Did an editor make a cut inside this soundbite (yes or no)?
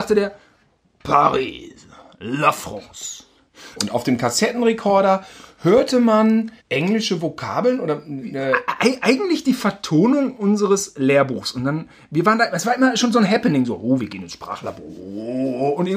yes